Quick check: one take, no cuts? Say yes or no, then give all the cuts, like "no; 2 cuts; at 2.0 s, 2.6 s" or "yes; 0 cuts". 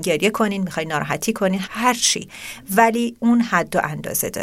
no; 1 cut; at 1.6 s